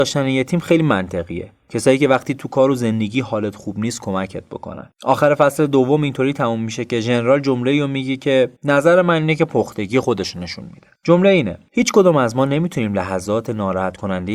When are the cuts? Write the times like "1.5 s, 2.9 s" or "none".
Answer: 8.6 s